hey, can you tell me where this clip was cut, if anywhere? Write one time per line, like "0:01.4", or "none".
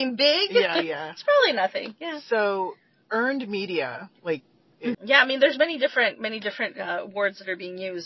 0:04.9